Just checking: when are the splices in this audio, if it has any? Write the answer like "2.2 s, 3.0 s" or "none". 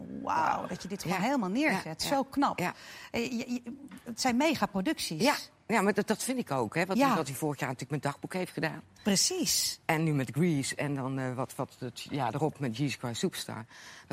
none